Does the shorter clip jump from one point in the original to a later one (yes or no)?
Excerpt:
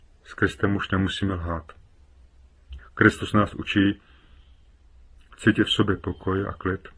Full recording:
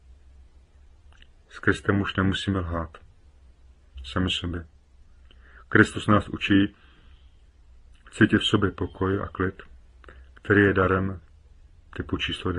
yes